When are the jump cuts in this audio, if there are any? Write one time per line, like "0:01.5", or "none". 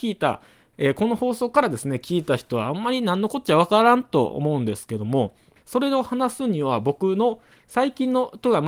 0:05.6